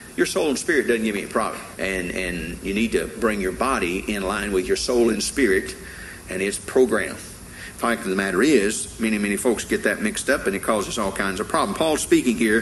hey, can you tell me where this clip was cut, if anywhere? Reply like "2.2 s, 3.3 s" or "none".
1.7 s